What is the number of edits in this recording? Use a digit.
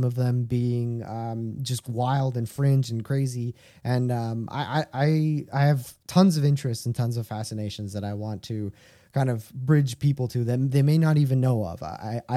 0